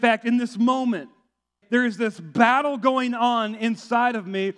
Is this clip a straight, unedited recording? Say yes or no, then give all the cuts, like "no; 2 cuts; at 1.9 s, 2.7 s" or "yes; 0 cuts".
no; 1 cut; at 1.6 s